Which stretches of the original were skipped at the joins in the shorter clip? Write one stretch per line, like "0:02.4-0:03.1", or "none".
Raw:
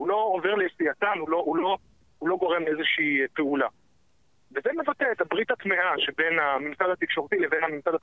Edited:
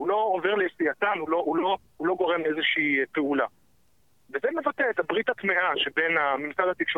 0:01.9-0:02.1

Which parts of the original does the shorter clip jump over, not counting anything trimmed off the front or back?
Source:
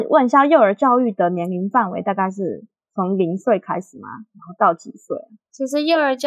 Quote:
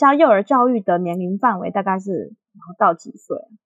0:02.8-0:04.3

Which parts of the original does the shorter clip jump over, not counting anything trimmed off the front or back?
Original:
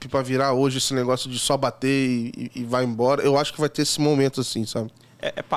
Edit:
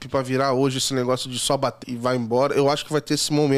0:01.8-0:02.5

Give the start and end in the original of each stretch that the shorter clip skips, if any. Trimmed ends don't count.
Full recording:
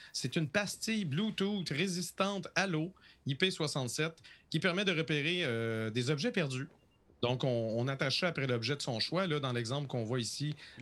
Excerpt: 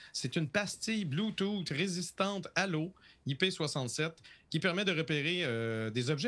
none

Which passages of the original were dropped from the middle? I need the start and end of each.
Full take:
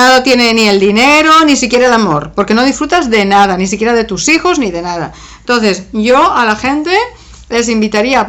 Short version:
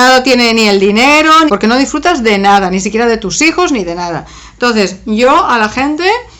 0:01.5-0:02.3

